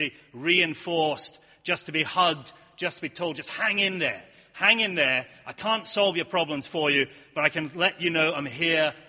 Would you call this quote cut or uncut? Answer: uncut